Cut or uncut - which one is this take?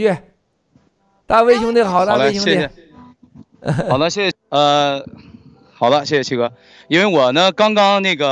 cut